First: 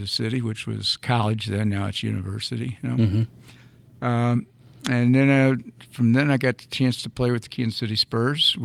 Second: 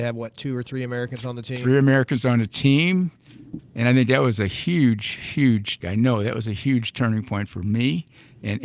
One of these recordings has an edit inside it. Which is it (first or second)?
second